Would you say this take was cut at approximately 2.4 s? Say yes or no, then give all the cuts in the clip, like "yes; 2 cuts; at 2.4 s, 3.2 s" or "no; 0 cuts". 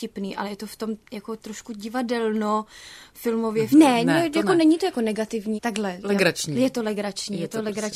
no; 2 cuts; at 3.7 s, 5.6 s